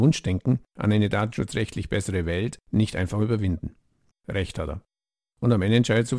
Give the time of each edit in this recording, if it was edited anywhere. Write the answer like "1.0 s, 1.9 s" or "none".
4.1 s